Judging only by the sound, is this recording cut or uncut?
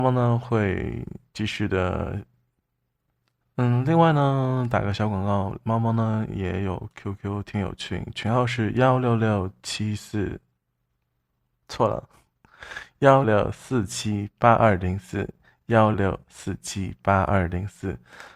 cut